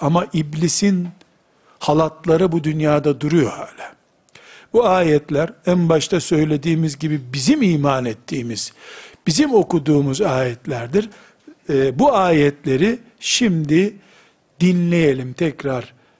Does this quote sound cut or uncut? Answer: uncut